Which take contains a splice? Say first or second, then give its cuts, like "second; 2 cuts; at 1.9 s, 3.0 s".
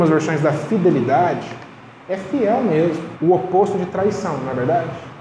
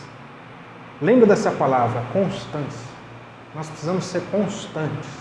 first; 1 cut; at 3.1 s